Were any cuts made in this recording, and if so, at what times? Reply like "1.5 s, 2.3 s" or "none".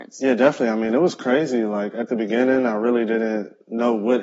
none